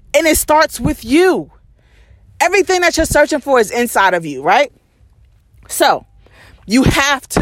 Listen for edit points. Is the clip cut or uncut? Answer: uncut